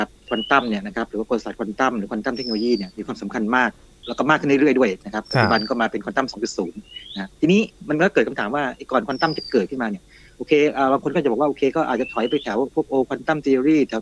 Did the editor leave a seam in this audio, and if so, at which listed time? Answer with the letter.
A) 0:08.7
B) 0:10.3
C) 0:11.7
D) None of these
D